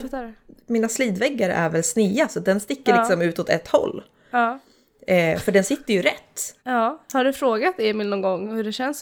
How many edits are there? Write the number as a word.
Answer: one